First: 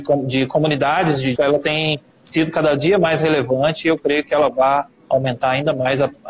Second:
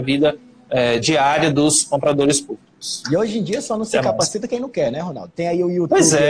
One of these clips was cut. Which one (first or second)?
first